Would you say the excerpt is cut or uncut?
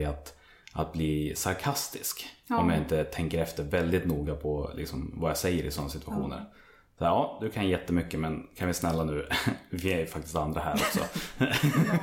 uncut